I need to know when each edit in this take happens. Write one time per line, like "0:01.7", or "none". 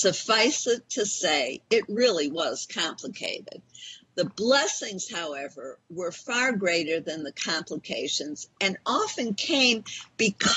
none